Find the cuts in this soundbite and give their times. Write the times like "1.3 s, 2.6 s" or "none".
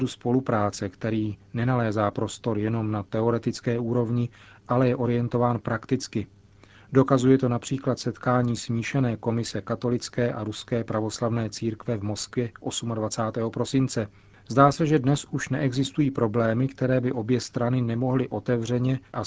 none